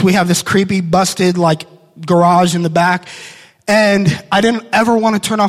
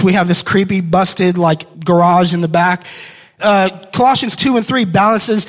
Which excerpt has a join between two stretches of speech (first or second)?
second